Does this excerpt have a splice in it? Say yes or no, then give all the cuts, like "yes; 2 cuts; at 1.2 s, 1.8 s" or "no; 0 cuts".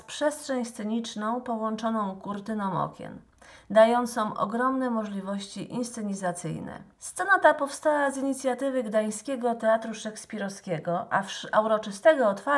no; 0 cuts